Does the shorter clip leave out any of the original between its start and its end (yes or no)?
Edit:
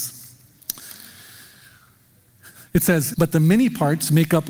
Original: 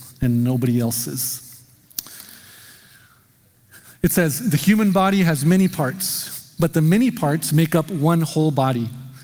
yes